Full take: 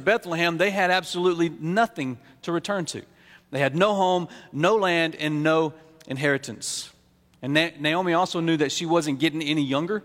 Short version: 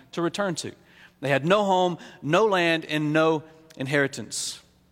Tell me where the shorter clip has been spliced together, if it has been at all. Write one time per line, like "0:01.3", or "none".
none